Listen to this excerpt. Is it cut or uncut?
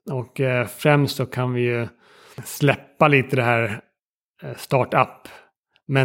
uncut